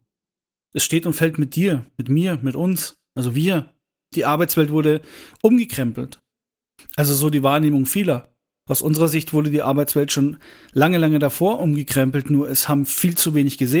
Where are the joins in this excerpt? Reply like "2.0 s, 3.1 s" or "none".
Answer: 4.1 s